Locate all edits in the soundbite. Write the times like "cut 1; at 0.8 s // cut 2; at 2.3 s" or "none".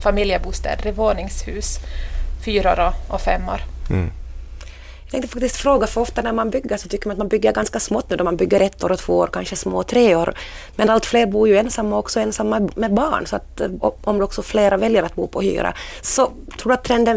cut 1; at 13.8 s